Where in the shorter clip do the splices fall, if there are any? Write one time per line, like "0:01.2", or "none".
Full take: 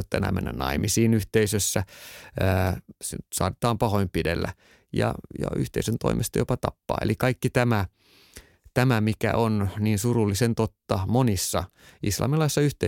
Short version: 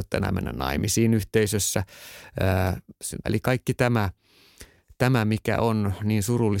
0:03.2